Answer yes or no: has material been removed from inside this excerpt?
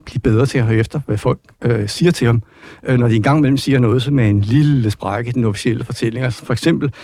no